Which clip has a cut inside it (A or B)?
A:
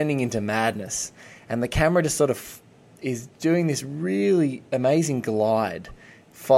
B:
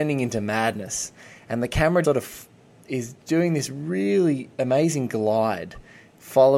B